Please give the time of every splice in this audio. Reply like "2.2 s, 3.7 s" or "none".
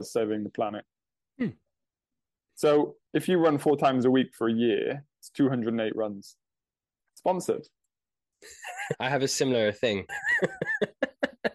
7.0 s, 8.9 s, 10.1 s